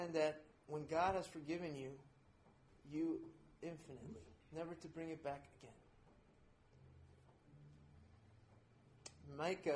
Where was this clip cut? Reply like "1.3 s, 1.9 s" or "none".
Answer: 2.7 s, 4.4 s